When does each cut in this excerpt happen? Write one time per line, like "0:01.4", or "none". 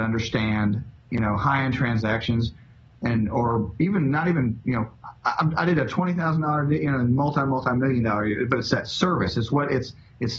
none